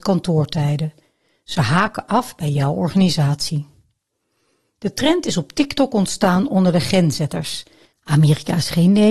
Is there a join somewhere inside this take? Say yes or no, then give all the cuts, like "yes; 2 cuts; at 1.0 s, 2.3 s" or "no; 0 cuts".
yes; 1 cut; at 7.9 s